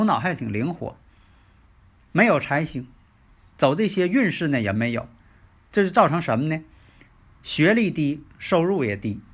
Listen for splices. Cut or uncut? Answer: uncut